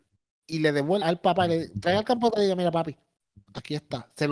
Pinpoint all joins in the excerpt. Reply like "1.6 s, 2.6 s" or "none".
1.0 s